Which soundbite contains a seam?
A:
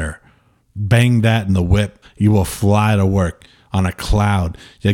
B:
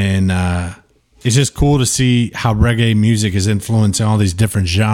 A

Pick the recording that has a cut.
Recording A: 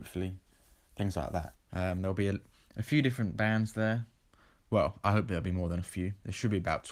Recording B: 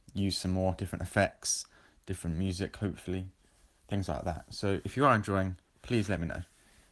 A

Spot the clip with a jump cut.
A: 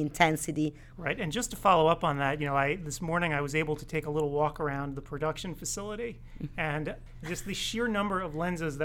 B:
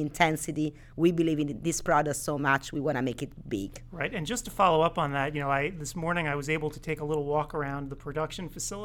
A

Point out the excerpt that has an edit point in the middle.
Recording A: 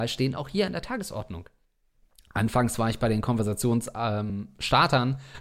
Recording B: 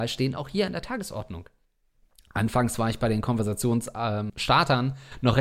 B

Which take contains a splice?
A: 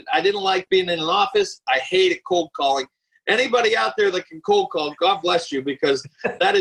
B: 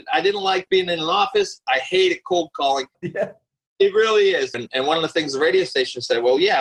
B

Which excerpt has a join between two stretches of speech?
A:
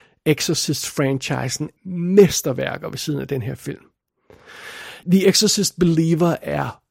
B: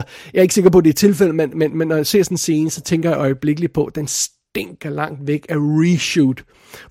A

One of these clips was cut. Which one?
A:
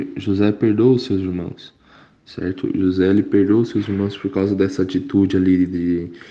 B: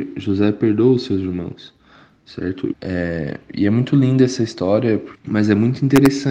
B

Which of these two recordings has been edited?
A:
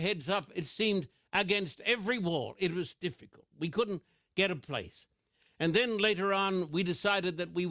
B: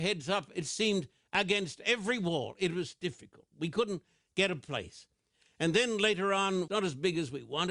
B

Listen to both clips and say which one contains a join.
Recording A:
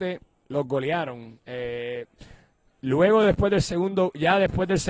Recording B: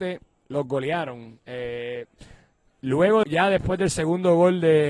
B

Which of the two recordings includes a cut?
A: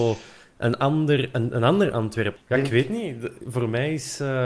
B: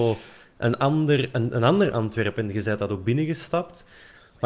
A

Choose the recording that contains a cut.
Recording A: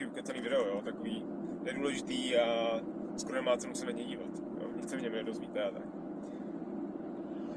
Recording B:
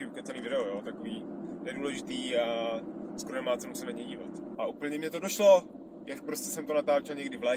B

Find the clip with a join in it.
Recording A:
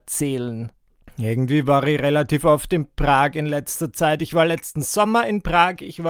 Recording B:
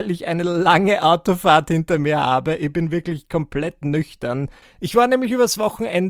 B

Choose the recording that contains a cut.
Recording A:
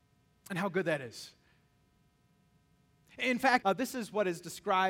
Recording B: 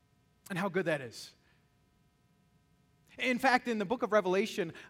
A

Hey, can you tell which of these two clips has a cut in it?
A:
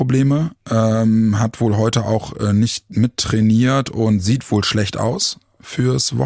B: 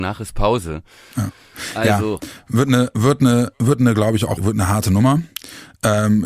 B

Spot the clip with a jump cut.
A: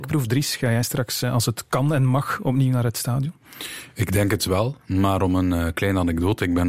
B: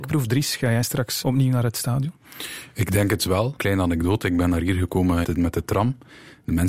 B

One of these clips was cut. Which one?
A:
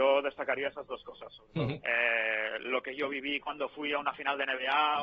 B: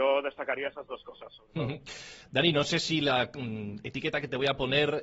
A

